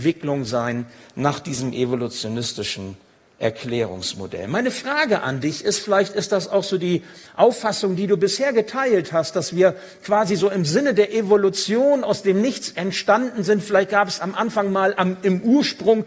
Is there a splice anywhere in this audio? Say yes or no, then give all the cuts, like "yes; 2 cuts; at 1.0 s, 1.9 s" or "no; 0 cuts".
no; 0 cuts